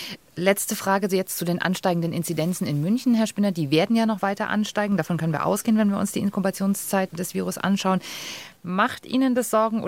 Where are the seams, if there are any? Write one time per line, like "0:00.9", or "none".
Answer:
none